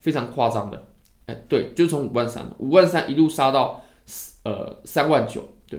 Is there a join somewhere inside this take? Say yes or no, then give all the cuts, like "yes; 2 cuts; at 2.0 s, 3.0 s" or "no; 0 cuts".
no; 0 cuts